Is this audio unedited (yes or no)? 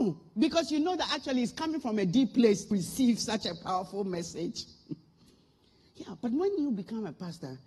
no